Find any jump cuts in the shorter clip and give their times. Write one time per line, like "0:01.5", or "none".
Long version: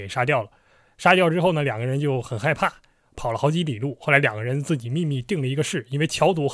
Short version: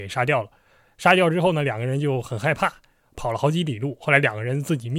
none